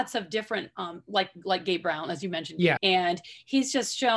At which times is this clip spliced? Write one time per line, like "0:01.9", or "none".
0:02.8

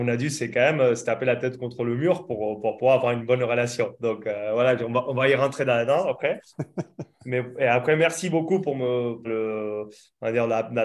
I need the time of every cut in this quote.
0:09.2

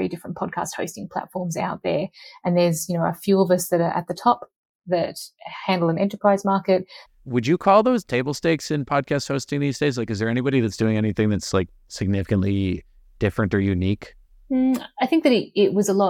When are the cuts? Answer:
0:07.1

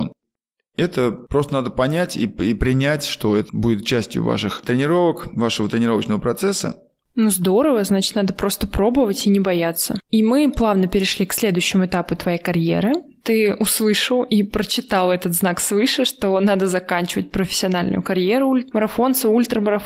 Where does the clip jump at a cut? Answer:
0:07.0

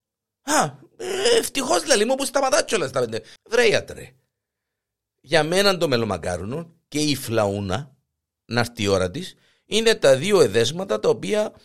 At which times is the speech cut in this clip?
0:03.4

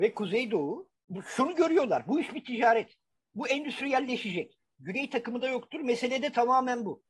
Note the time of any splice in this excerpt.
0:04.8

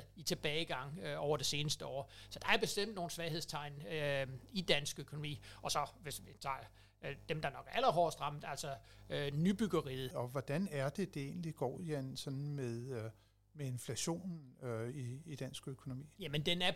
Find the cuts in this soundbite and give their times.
0:10.1

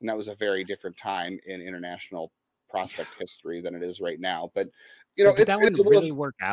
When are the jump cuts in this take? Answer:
none

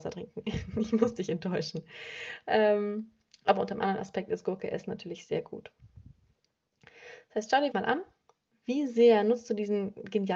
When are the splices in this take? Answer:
0:07.7

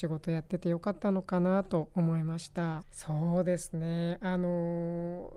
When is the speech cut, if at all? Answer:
0:02.8

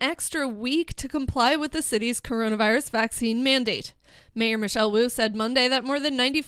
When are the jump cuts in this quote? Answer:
none

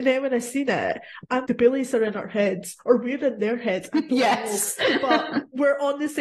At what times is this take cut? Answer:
0:01.4

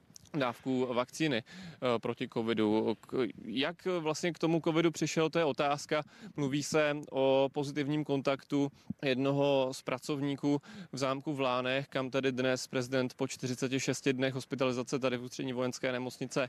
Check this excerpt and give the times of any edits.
0:09.0

